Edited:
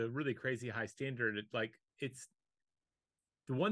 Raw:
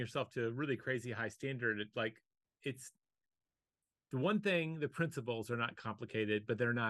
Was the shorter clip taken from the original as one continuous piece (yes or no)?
no